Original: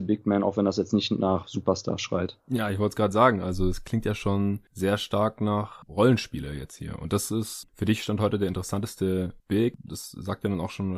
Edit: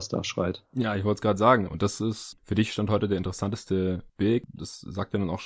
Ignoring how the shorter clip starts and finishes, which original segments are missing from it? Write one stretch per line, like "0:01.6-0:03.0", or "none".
0:03.4-0:07.0